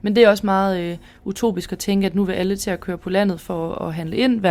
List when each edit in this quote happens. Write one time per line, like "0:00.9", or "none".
none